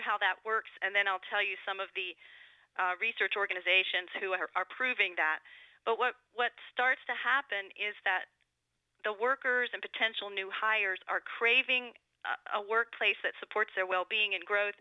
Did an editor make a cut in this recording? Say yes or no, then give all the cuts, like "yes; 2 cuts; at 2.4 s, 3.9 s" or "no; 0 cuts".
no; 0 cuts